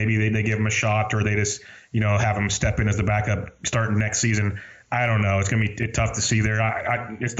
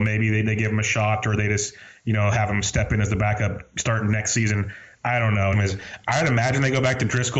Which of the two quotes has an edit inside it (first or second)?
second